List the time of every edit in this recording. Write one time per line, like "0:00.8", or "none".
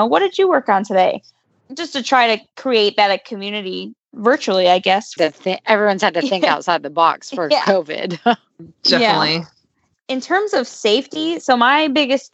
0:05.2